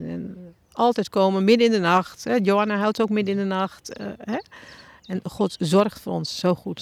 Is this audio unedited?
yes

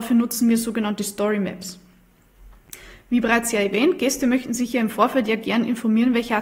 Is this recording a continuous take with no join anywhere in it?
yes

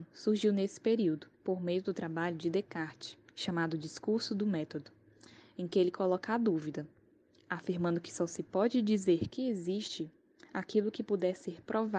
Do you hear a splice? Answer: yes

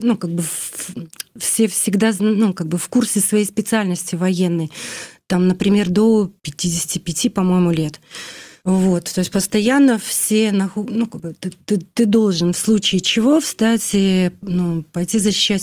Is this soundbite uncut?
yes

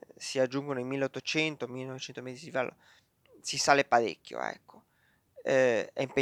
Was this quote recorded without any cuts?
yes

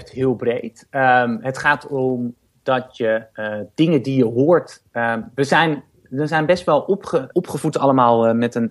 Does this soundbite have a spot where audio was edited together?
yes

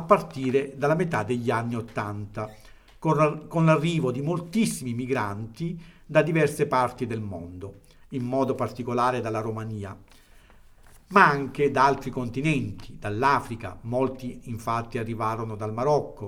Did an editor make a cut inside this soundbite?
yes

